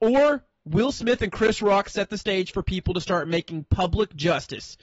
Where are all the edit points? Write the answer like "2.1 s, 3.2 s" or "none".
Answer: none